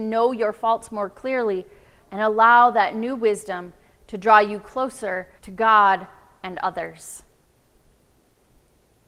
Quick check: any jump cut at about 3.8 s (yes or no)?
no